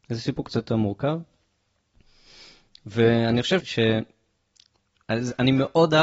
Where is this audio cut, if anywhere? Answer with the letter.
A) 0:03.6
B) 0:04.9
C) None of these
A